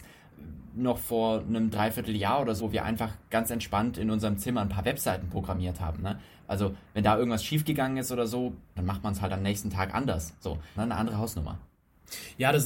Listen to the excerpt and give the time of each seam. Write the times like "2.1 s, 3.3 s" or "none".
2.6 s, 8.8 s, 10.8 s

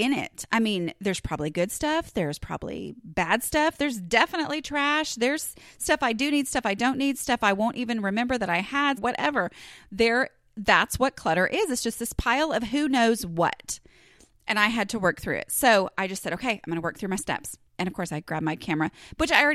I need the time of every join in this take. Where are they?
9.0 s, 17.7 s

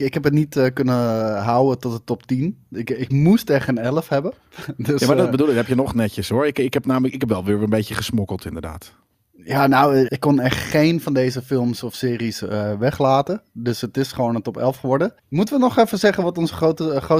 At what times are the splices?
10.1 s, 15.2 s

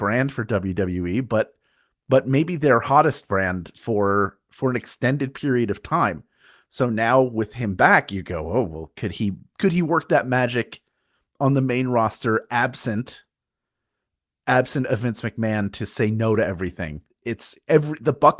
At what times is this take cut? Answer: 17.1 s

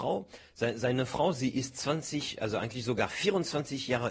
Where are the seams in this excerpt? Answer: none

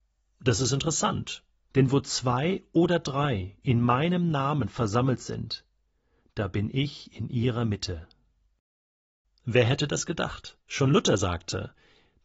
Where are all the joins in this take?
1.7 s, 9.2 s, 10.6 s

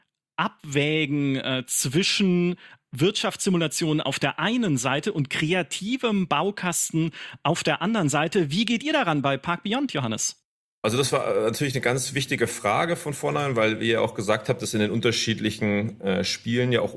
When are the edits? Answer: none

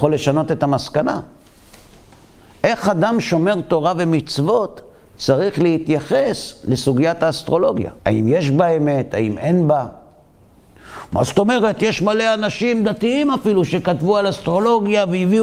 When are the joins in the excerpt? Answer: 8.0 s

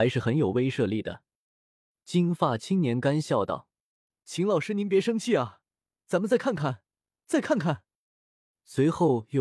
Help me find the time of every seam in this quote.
none

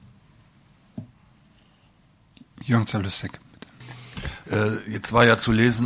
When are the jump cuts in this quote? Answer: 4.4 s

